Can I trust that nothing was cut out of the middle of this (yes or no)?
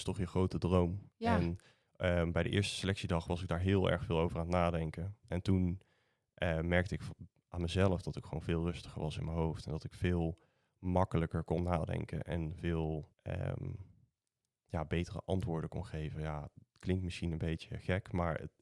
no